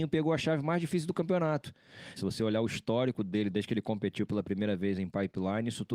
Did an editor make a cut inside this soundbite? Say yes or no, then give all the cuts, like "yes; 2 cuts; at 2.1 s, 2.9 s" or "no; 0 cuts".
yes; 2 cuts; at 2.2 s, 3.5 s